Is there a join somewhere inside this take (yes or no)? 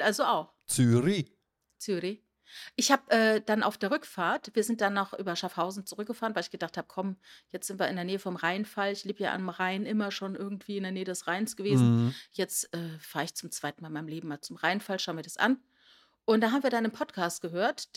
no